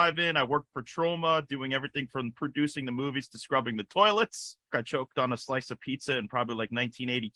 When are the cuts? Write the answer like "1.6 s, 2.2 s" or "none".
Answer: 4.7 s